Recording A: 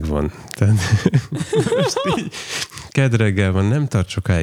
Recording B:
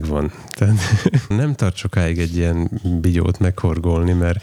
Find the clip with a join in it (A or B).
B